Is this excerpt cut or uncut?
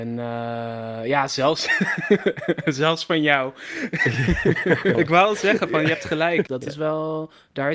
cut